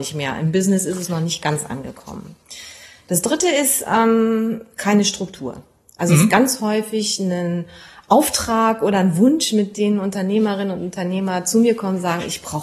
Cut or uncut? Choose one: uncut